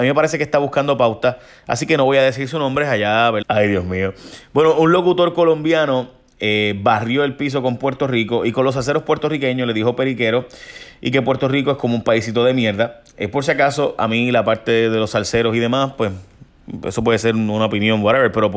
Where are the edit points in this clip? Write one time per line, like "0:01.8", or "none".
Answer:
0:03.4